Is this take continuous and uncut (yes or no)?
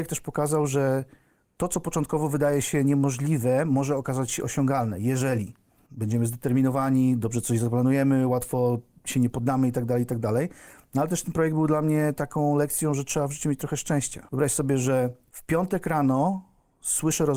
yes